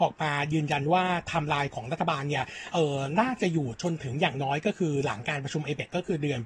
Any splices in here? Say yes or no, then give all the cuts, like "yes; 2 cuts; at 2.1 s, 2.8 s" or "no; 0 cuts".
no; 0 cuts